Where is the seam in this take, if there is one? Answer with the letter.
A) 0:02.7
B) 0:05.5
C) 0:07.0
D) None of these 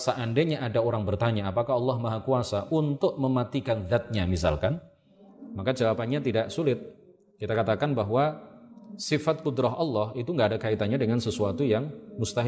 D